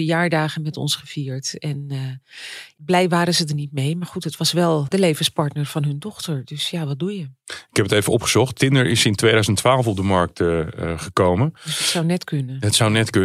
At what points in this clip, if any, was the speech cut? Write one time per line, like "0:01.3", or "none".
none